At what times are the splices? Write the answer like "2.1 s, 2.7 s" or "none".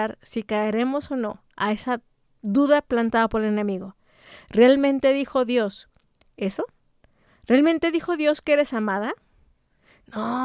none